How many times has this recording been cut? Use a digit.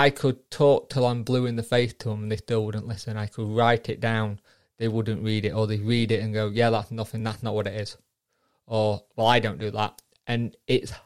0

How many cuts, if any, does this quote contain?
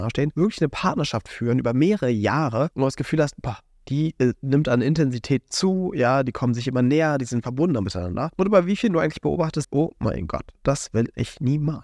1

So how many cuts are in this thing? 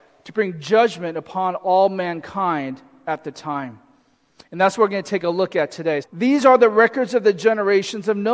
1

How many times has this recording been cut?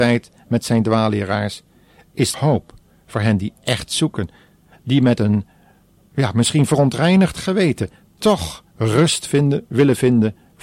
1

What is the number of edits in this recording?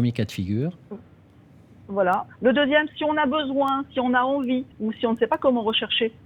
2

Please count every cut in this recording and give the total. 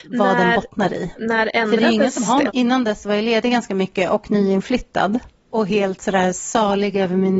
1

